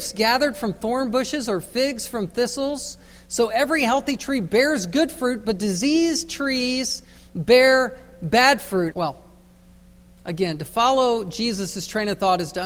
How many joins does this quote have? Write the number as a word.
one